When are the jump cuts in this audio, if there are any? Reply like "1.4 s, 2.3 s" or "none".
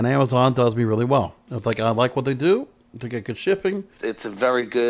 4.0 s